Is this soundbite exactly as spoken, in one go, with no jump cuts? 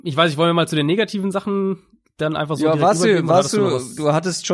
yes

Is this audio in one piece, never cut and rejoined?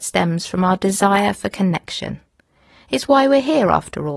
yes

